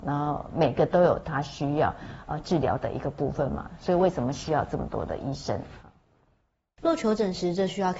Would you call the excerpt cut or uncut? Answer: cut